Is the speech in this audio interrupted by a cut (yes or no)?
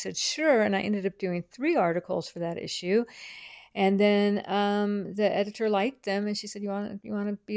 no